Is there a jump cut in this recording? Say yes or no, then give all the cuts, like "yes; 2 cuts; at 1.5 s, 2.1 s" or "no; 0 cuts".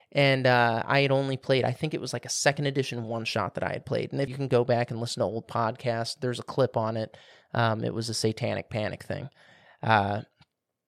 yes; 1 cut; at 4.3 s